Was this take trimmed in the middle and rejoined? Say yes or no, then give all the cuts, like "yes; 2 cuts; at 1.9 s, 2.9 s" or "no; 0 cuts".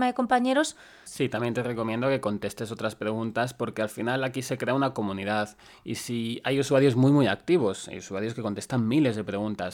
yes; 1 cut; at 1.1 s